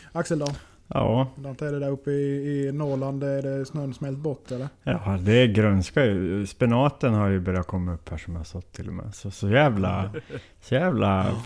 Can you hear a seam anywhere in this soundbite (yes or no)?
no